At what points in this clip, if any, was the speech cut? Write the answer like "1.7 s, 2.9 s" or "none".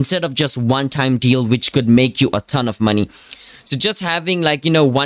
3.5 s